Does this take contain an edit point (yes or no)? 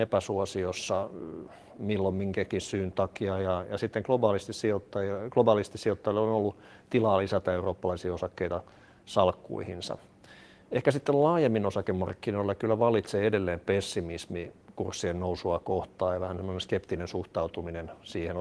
no